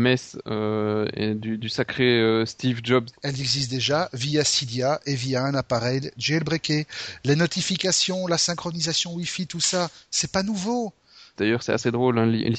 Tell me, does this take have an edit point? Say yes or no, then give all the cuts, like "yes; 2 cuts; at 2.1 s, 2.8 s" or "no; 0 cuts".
yes; 2 cuts; at 3.1 s, 11.4 s